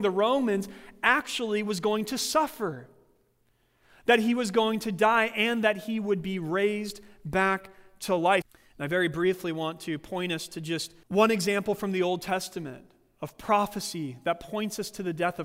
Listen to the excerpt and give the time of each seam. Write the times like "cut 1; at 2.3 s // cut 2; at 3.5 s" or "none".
cut 1; at 8.4 s // cut 2; at 11.0 s